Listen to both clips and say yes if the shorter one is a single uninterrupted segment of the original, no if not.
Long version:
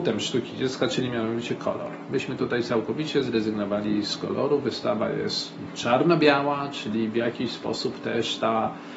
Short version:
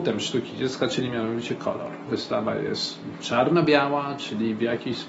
no